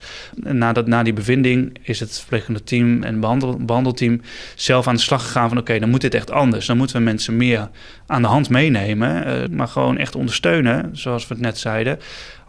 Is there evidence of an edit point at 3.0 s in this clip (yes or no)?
yes